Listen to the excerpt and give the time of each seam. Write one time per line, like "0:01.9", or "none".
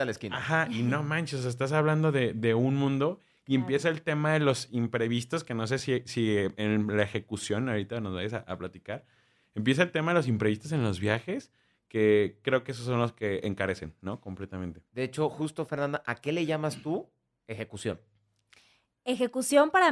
none